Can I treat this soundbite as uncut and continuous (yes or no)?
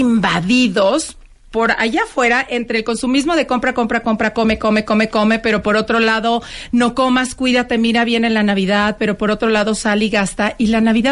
yes